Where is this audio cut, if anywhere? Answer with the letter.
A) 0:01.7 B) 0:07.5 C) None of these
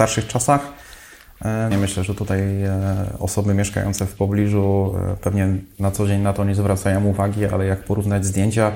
A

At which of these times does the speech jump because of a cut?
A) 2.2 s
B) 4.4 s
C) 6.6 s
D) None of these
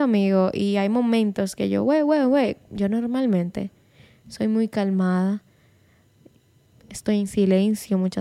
D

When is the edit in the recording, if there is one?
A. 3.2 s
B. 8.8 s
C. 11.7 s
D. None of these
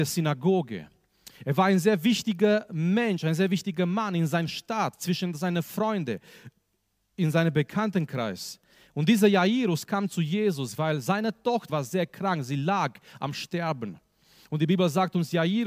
C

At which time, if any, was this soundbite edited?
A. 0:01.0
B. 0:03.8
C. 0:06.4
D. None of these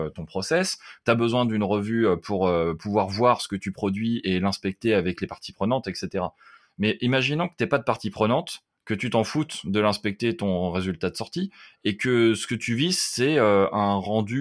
D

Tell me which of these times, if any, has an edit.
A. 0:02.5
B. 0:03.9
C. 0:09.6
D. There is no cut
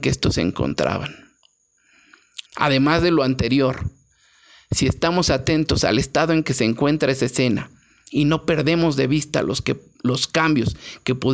A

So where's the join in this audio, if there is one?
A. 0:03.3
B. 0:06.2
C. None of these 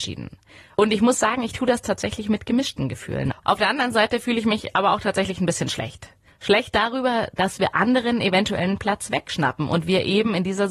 A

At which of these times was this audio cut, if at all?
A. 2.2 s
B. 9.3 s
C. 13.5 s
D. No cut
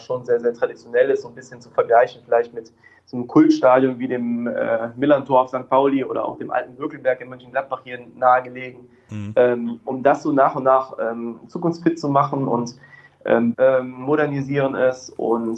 C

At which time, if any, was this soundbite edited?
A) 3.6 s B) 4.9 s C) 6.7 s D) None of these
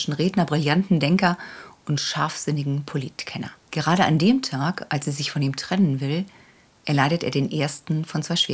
A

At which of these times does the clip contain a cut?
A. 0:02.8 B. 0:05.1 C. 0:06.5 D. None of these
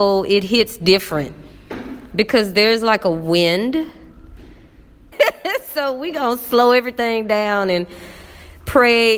B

